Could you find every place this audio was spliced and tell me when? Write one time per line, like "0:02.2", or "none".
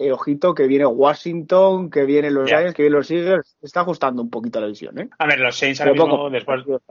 none